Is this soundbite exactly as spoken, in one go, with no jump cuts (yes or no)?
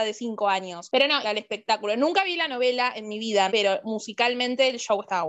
no